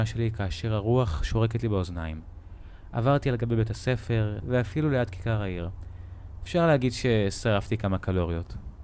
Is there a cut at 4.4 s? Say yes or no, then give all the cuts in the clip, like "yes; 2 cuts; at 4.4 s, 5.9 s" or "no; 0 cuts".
yes; 1 cut; at 4.4 s